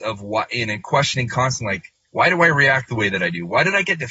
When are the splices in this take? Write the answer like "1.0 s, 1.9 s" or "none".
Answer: none